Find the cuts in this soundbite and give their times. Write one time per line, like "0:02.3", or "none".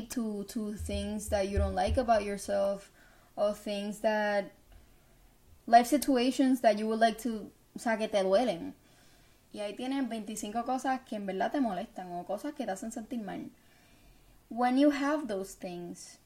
0:09.5